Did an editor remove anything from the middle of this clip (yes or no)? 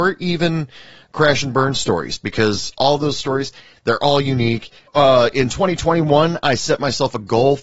yes